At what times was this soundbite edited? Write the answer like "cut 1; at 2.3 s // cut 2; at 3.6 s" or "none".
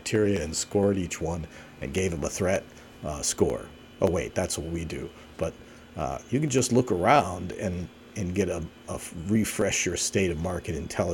cut 1; at 5.3 s